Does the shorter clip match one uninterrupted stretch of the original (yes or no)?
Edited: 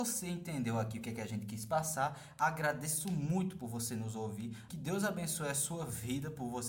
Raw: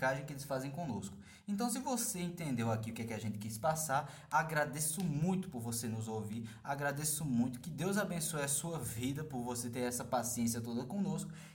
no